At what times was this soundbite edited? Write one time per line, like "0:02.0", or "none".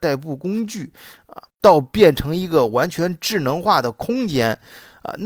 0:01.5